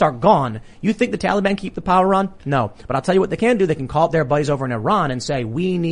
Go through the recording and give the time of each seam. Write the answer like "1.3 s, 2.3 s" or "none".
none